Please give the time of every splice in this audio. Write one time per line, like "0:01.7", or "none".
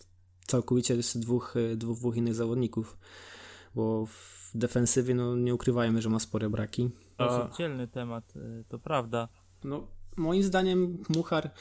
0:07.2
0:09.6